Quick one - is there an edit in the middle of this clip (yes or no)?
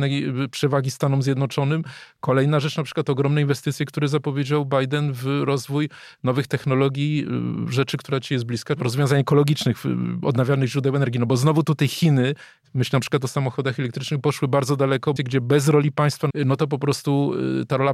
yes